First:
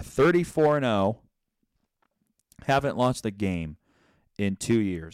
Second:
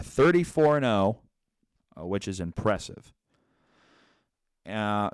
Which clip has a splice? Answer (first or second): second